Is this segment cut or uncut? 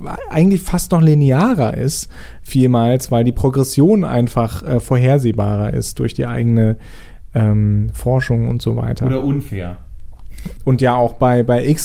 cut